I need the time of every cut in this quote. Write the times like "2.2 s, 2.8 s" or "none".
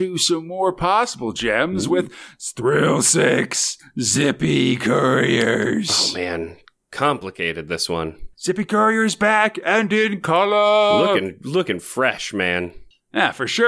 8.3 s